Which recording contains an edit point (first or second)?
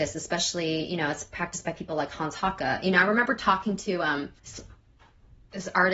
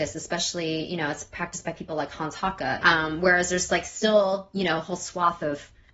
second